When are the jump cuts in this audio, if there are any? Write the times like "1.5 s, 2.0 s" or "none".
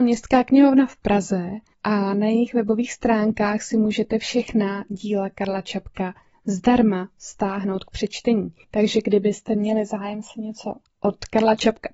none